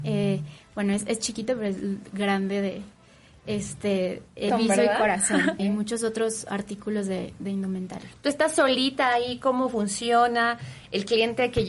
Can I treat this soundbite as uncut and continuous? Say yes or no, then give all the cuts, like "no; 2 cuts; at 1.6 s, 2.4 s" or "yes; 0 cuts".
no; 2 cuts; at 4.5 s, 5.6 s